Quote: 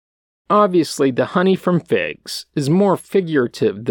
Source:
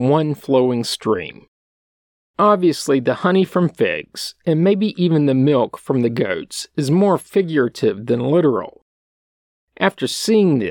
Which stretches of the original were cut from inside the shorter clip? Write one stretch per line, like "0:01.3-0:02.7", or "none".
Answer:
0:04.4-0:06.7